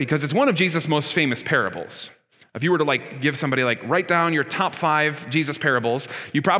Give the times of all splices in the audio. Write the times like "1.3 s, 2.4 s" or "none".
none